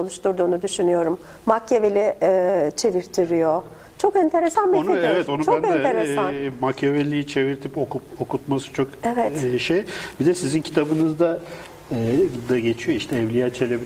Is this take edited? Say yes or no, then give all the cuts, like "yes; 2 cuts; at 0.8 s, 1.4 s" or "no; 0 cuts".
no; 0 cuts